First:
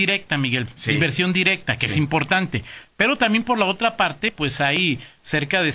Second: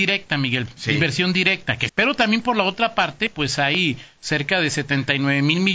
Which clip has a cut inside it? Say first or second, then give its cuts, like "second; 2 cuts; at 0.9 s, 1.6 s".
second; 1 cut; at 1.9 s